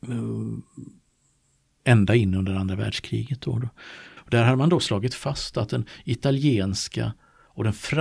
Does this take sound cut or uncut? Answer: cut